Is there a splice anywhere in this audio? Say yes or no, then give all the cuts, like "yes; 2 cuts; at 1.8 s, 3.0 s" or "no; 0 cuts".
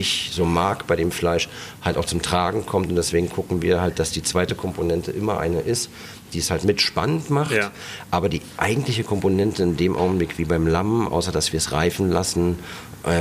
no; 0 cuts